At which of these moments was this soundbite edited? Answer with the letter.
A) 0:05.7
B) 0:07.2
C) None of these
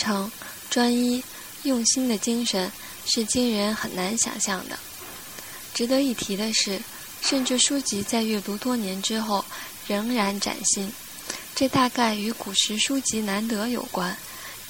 B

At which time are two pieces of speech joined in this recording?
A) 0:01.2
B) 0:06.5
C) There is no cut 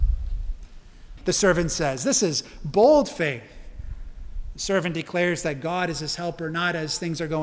A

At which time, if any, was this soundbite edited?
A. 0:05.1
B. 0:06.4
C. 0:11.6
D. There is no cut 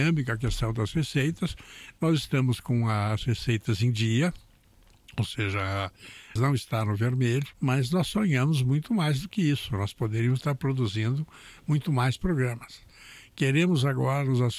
B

